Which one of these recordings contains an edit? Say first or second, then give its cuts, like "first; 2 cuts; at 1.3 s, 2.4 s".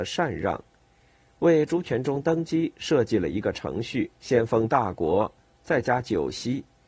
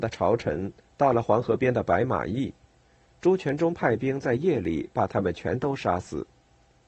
first; 1 cut; at 4.1 s